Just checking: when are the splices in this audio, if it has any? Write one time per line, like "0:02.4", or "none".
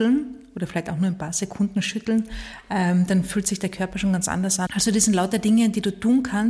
0:04.7